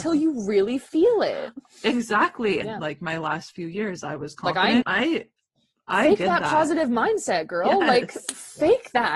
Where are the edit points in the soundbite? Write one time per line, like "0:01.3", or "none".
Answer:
0:02.6
0:04.8